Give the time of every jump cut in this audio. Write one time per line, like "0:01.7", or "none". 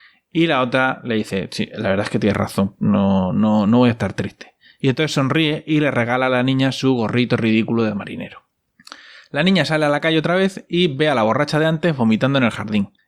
none